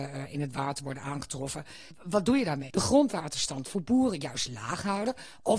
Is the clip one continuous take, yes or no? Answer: no